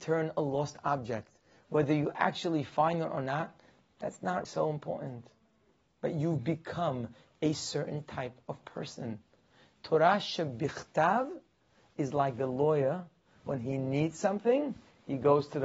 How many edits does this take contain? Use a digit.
1